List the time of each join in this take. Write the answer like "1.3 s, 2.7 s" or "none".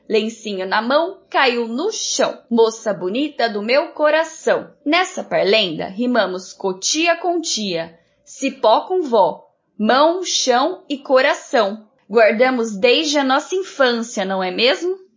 none